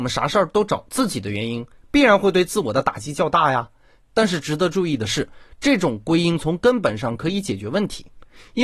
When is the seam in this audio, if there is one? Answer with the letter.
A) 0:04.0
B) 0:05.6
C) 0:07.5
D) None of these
A